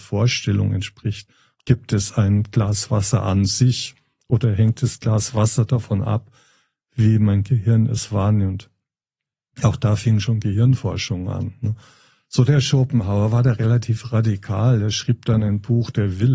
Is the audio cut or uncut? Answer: cut